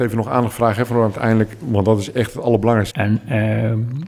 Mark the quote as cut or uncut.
cut